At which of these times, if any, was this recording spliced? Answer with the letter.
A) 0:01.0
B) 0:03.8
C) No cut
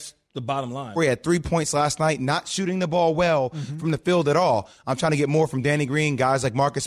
A